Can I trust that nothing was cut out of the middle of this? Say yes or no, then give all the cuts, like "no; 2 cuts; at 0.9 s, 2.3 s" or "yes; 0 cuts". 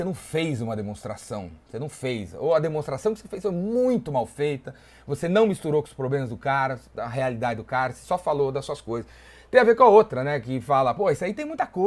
yes; 0 cuts